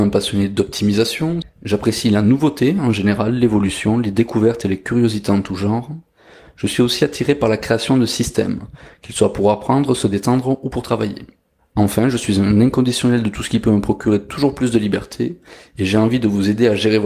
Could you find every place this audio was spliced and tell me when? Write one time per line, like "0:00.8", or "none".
0:01.4